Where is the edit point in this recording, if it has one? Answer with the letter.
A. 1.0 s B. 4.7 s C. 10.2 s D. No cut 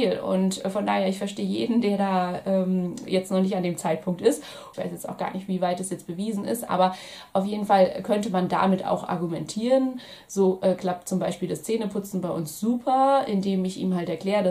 B